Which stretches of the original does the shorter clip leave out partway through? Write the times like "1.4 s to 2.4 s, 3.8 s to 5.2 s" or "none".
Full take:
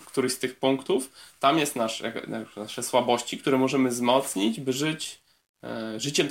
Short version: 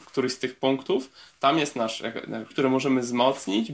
2.5 s to 3.4 s